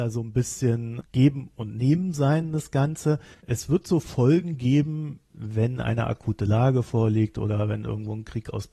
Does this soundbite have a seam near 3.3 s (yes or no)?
yes